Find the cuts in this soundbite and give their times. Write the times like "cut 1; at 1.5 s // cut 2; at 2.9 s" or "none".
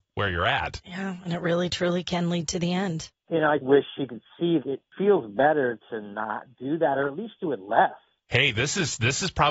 cut 1; at 3.6 s // cut 2; at 4.6 s